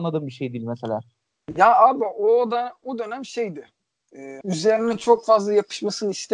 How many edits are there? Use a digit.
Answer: 1